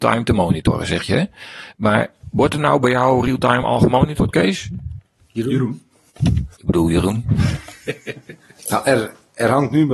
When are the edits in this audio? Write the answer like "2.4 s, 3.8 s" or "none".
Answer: 6.5 s